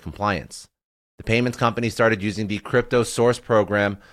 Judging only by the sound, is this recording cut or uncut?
uncut